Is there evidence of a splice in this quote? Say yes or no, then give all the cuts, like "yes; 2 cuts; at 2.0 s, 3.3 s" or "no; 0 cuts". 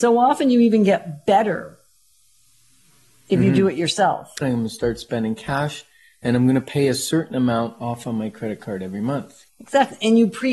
yes; 2 cuts; at 4.4 s, 9.5 s